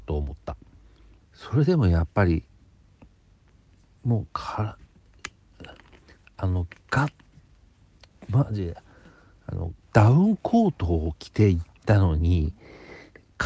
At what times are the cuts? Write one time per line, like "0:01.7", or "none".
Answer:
0:01.2
0:09.8